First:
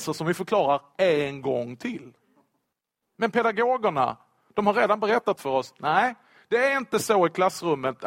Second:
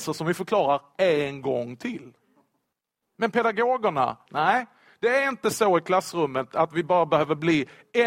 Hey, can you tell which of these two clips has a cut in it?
second; 1 cut; at 4.3 s

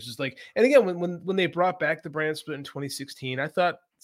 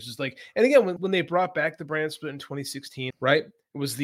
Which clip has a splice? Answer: second; 2 cuts; at 1.0 s, 3.1 s

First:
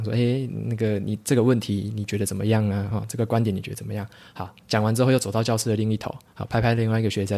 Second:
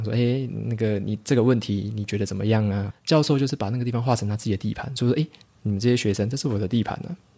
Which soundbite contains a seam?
second; 1 cut; at 2.9 s

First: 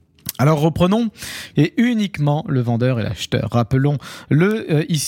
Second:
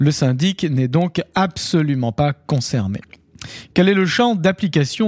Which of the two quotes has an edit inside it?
first; 1 cut; at 1.5 s

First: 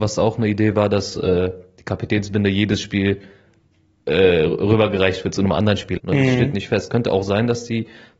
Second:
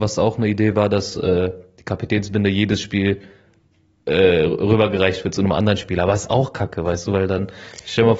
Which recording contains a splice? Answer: first; 1 cut; at 6.0 s

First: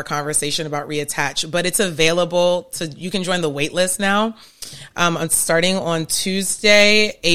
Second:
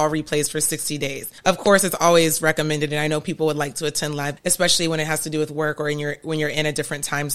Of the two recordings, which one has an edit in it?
second; 2 cuts; at 1.4 s, 4.4 s

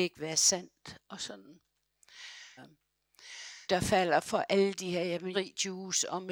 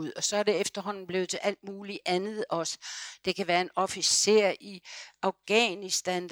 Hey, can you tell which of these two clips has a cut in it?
first; 3 cuts; at 2.6 s, 3.7 s, 5.3 s

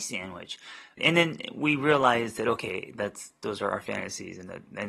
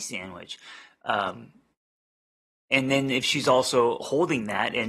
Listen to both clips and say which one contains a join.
first; 1 cut; at 1.0 s

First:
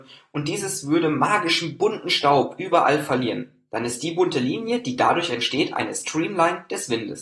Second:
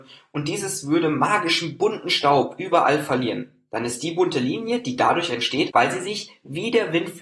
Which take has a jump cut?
second; 1 cut; at 5.7 s

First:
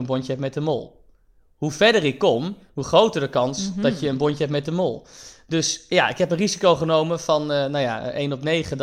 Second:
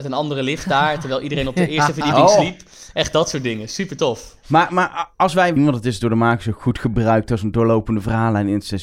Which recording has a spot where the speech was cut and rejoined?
second; 1 cut; at 5.6 s

